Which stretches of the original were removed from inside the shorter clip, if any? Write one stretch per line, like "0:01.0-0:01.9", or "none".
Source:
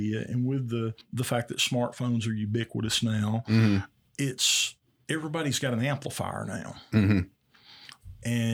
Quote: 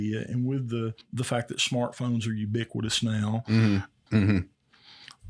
0:04.1-0:06.9